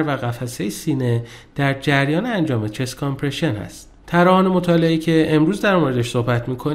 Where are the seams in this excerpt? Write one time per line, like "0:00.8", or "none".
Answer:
0:04.0